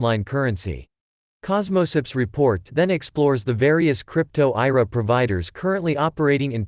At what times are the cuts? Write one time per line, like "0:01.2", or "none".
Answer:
0:01.2